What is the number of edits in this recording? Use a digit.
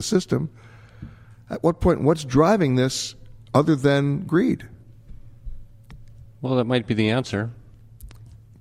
0